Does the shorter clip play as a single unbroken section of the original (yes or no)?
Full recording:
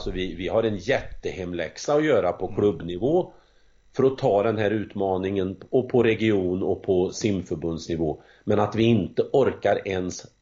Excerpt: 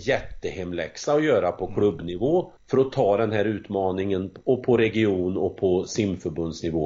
no